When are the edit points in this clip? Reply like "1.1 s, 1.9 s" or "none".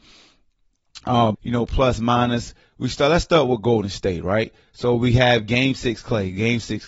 1.3 s